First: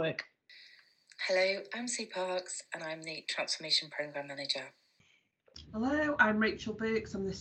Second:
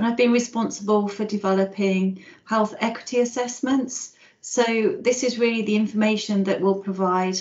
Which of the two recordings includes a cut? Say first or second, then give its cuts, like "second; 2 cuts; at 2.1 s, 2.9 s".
first; 1 cut; at 5.6 s